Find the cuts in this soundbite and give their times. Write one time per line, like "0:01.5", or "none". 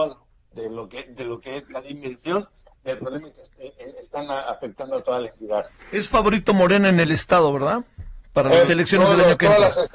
0:08.7